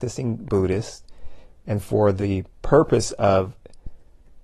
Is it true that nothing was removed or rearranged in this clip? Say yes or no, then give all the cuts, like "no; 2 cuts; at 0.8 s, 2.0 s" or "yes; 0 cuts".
yes; 0 cuts